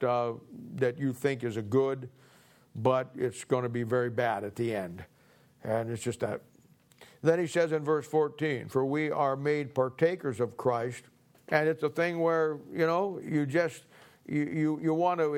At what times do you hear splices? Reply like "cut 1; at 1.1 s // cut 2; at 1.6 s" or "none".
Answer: cut 1; at 11.3 s // cut 2; at 13.2 s